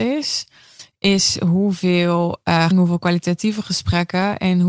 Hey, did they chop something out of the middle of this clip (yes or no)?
yes